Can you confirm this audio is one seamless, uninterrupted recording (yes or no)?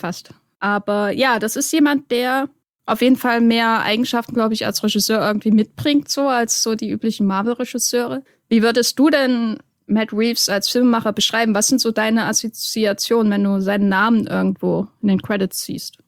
yes